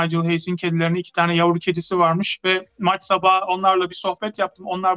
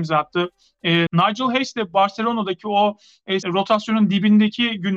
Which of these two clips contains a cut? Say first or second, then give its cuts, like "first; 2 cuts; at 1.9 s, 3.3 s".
second; 2 cuts; at 1.1 s, 3.4 s